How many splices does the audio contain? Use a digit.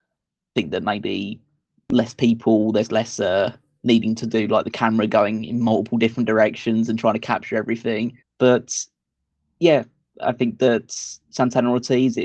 1